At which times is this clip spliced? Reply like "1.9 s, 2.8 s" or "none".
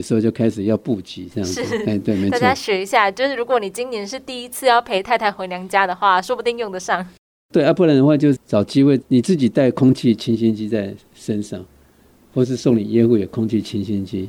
none